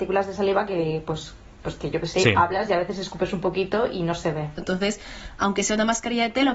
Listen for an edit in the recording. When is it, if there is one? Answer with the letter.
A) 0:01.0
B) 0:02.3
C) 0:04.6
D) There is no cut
C